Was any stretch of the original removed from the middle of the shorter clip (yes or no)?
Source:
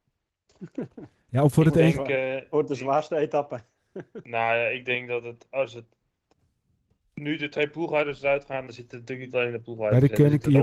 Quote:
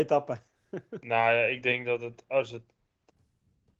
no